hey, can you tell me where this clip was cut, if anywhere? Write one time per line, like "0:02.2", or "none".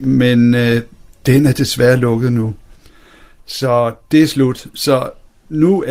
none